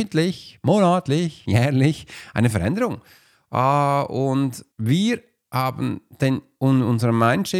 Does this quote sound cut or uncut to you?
cut